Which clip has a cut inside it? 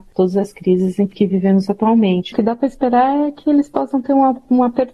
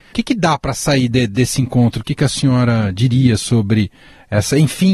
first; 1 cut; at 2.3 s

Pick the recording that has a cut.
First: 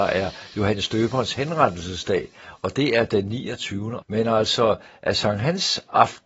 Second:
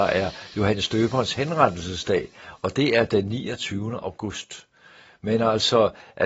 first; 1 cut; at 4.0 s

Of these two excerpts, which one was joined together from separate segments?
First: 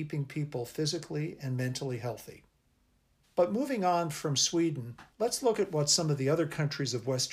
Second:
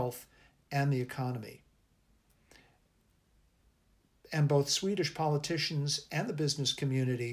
first; 2 cuts; at 3.2 s, 5.1 s

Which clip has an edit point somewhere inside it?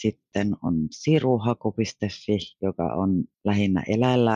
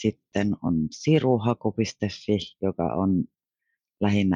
first; 1 cut; at 3.3 s

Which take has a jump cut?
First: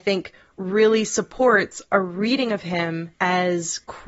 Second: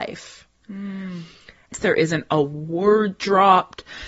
second; 1 cut; at 1.7 s

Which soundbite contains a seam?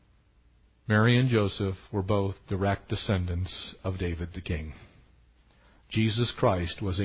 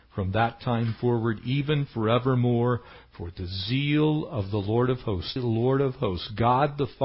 second; 1 cut; at 5.4 s

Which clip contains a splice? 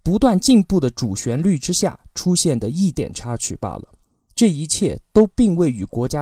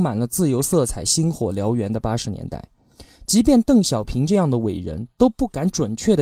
first; 1 cut; at 2.9 s

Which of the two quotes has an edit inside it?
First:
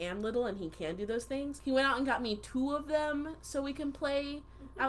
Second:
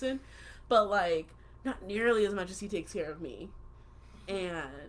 first; 1 cut; at 1.6 s

